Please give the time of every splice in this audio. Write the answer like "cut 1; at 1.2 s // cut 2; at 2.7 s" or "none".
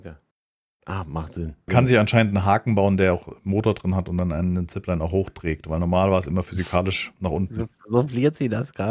cut 1; at 1.7 s